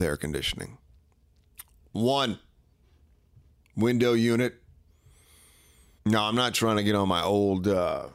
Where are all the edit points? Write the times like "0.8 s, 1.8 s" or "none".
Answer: 6.0 s